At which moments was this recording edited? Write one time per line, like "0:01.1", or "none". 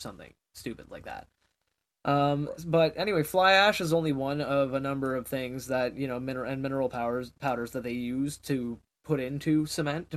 none